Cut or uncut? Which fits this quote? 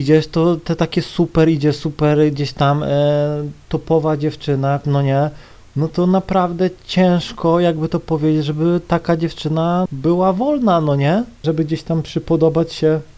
cut